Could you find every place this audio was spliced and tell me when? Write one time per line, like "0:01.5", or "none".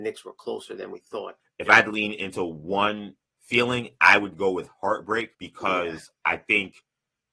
0:01.4
0:05.3